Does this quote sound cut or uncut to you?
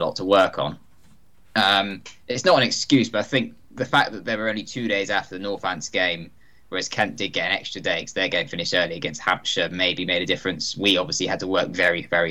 uncut